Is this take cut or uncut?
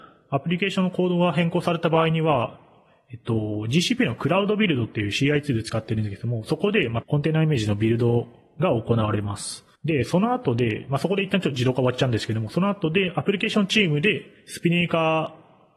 cut